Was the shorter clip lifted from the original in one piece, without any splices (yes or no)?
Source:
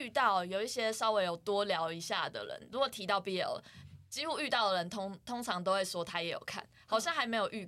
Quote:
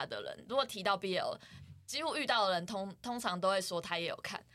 yes